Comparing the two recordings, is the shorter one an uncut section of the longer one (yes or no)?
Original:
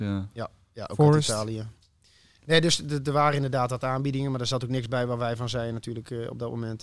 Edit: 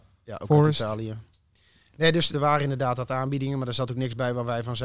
no